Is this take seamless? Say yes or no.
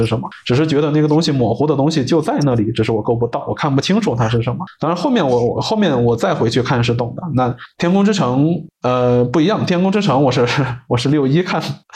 yes